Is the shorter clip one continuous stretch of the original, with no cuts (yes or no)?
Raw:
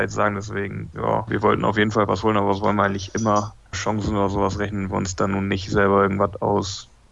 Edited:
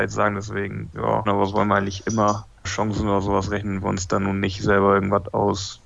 no